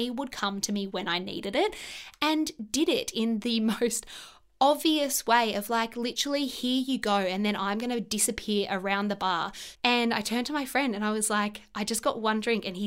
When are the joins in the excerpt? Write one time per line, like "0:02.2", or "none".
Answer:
0:09.8